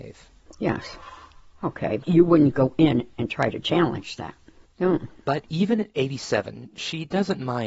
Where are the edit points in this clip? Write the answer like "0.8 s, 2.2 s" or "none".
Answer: 2.0 s, 4.6 s

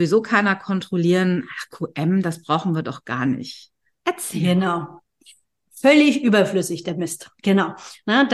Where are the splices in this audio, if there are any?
none

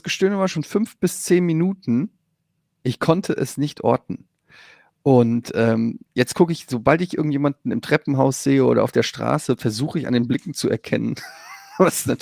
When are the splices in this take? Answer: 2.6 s

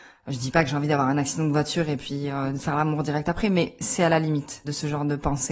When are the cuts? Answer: none

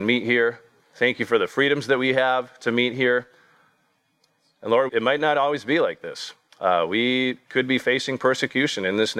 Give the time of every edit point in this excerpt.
4.9 s

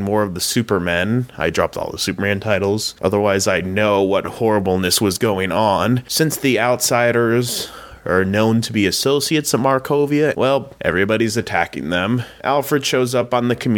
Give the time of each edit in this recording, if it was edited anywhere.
10.3 s

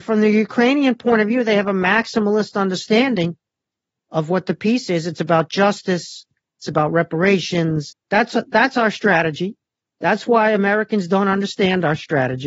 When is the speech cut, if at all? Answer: 7.9 s

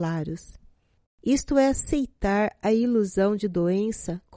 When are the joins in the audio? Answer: 1.0 s

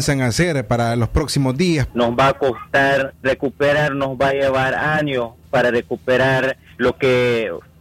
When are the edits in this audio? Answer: 1.9 s, 3.2 s, 6.7 s

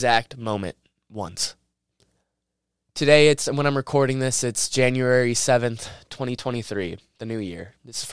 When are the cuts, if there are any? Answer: none

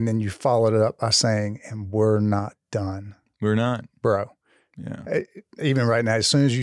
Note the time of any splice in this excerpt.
none

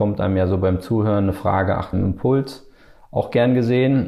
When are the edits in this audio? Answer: 1.9 s

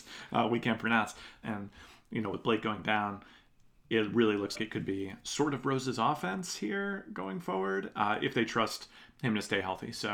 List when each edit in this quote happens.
1.4 s, 4.5 s

